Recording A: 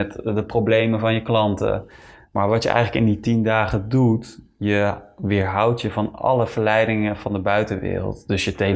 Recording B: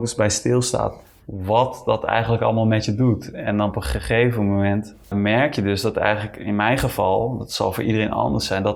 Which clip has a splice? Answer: B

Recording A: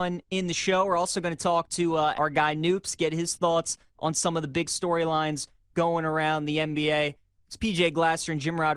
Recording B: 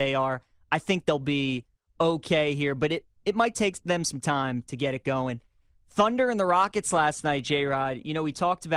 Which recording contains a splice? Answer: A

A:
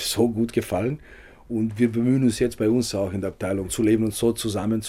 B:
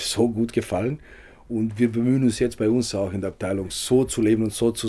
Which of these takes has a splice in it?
A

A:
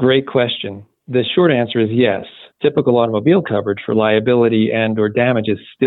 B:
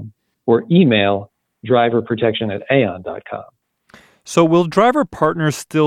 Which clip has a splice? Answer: A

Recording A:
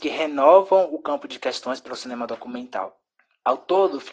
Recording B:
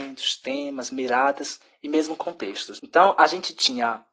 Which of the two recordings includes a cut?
B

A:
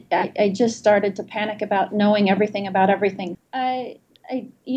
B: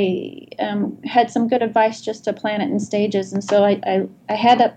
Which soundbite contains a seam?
A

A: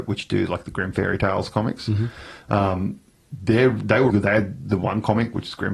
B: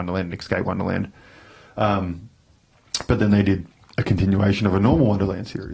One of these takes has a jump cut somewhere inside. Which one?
A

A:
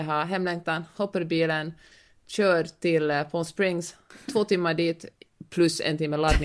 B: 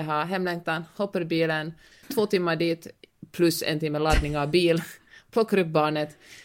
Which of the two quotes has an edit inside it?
B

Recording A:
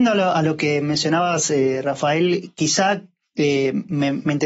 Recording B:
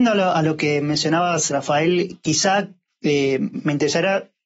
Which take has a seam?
B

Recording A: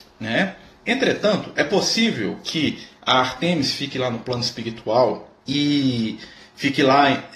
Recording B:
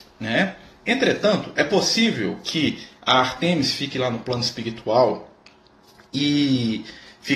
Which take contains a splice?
A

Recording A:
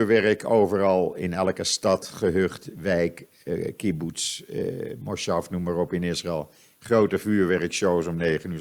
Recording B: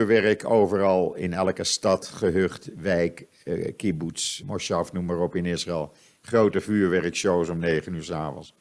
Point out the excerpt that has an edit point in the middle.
B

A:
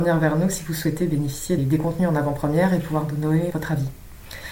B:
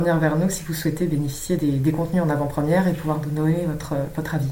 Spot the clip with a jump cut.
A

